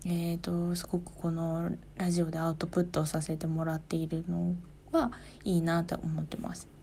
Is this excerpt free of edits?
yes; 0 cuts

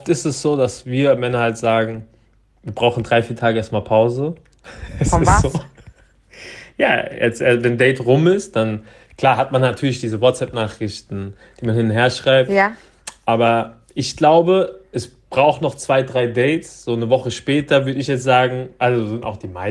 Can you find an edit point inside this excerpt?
no; 0 cuts

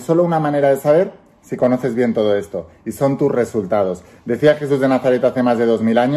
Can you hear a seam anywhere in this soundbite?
no; 0 cuts

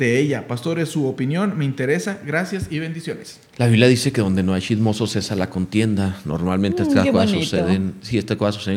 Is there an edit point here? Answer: yes; 1 cut; at 3.5 s

